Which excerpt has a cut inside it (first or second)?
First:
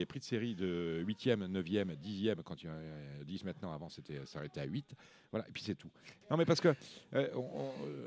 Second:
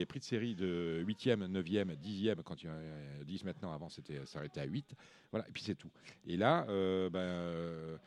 first